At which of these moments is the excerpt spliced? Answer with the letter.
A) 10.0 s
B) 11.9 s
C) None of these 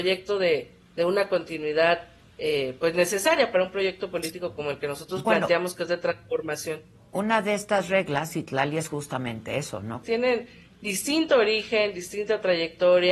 A